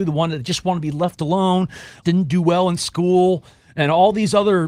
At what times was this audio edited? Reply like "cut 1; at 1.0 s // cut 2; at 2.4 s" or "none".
cut 1; at 2.0 s